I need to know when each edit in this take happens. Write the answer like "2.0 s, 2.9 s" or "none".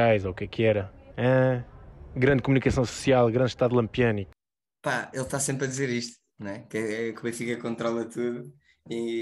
none